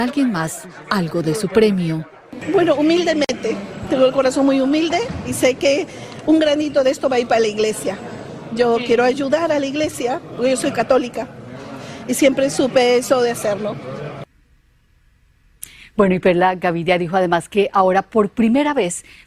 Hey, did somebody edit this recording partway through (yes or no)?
no